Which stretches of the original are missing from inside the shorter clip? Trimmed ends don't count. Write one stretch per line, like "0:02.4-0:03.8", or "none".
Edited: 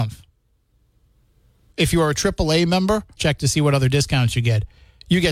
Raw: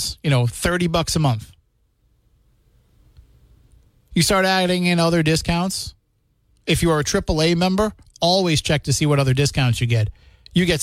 0:03.0-0:06.6
0:08.1-0:08.6